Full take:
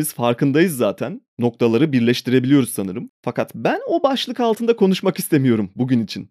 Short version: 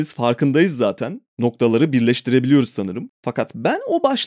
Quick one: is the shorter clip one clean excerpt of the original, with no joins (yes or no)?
yes